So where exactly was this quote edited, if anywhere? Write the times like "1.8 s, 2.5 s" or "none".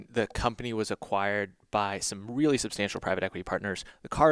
none